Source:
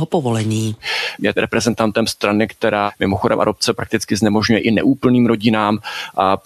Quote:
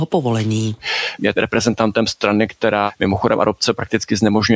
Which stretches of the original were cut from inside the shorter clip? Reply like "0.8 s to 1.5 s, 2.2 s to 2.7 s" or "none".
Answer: none